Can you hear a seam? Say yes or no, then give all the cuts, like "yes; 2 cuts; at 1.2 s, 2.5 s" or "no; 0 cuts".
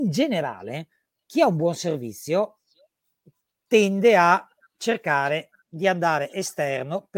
no; 0 cuts